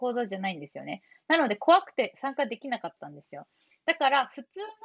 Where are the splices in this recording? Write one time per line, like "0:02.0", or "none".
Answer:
none